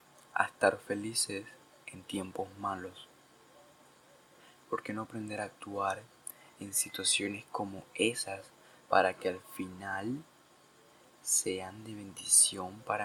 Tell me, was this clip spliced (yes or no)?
no